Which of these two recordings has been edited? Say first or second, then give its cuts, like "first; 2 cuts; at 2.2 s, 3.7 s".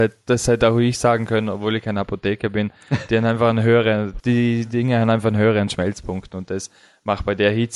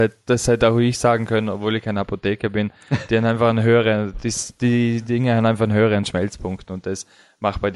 first; 1 cut; at 4.2 s